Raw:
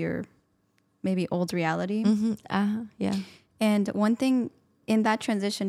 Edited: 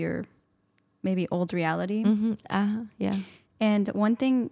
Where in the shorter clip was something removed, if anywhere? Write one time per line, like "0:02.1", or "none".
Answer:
none